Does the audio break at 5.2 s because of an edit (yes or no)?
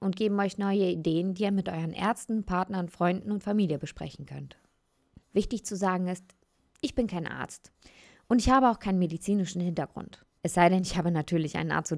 yes